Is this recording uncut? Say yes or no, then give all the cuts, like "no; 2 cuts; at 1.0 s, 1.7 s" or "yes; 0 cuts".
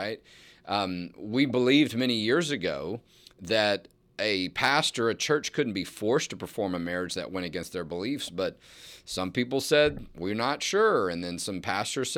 yes; 0 cuts